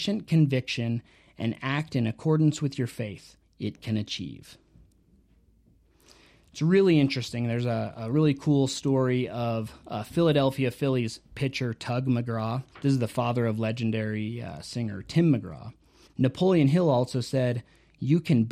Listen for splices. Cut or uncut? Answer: cut